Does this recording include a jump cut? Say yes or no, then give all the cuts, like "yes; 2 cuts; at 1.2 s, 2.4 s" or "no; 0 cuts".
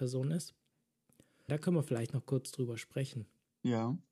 yes; 1 cut; at 1.5 s